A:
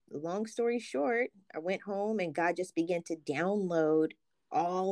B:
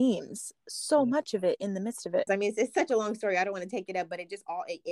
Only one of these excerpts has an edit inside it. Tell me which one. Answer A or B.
B